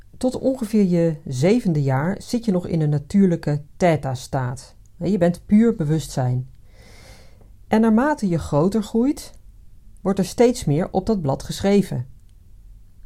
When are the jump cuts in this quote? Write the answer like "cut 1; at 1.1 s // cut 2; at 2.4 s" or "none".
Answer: cut 1; at 5.0 s